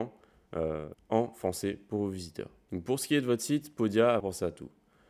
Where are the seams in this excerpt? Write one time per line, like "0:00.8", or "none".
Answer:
0:00.9
0:04.2